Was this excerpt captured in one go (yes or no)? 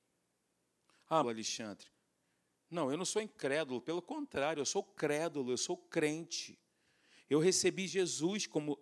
no